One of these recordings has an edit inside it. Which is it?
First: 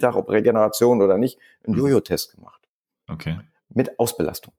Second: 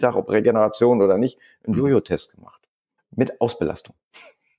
second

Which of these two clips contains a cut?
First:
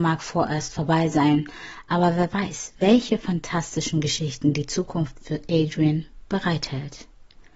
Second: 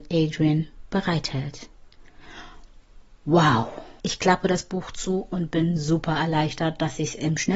second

